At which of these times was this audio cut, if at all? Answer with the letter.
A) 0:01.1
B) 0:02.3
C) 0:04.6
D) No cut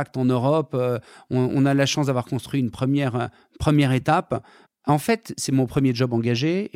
C